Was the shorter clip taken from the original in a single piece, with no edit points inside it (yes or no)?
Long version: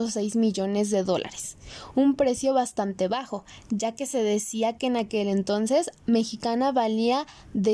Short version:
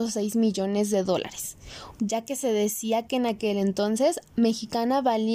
no